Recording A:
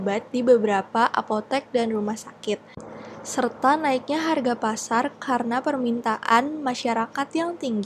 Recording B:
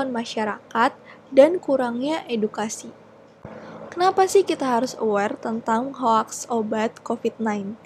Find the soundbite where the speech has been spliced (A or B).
B